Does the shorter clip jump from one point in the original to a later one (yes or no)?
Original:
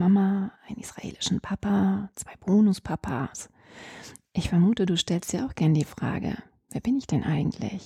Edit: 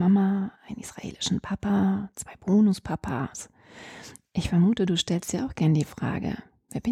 no